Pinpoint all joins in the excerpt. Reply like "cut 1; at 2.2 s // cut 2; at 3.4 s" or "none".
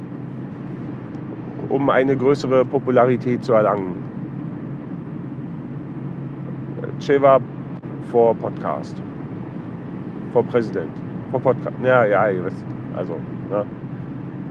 none